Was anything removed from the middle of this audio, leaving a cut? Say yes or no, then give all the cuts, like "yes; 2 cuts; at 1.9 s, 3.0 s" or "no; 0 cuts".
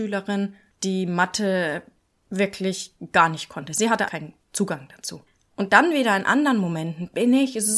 yes; 2 cuts; at 4.1 s, 5.5 s